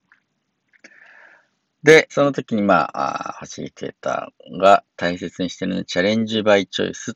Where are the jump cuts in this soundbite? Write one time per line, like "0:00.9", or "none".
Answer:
0:02.1

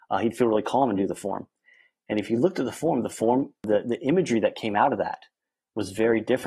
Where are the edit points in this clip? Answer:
none

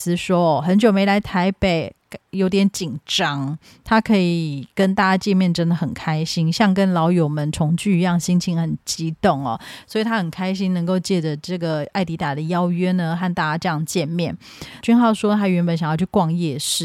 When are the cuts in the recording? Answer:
0:14.8

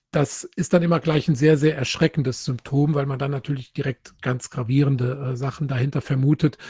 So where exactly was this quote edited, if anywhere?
none

